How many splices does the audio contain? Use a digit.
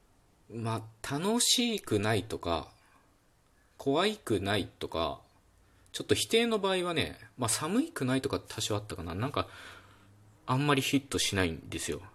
1